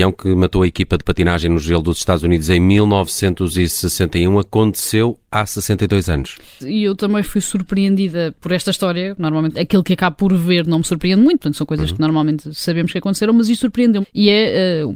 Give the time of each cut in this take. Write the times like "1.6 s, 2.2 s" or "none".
6.6 s, 9.5 s, 14.0 s